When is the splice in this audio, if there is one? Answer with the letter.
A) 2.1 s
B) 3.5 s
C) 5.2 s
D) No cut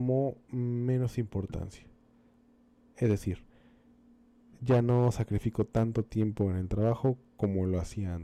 D